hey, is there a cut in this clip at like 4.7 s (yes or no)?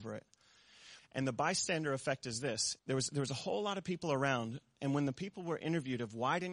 no